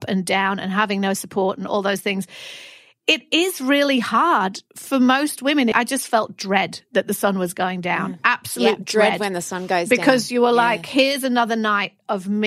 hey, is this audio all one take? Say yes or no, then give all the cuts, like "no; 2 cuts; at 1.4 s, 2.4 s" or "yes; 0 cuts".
no; 1 cut; at 5.7 s